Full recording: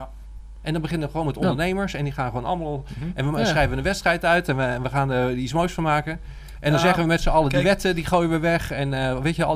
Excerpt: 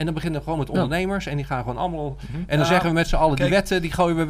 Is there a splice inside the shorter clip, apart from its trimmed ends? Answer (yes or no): yes